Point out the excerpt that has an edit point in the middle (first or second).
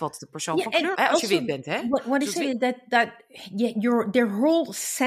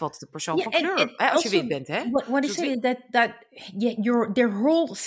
first